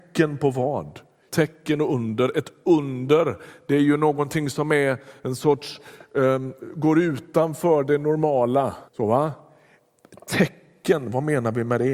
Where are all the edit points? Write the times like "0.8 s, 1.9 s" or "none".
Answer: 1.3 s, 8.9 s